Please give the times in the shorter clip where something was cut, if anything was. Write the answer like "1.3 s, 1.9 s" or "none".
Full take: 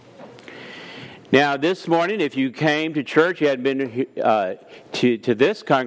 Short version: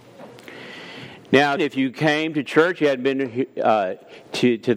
1.6 s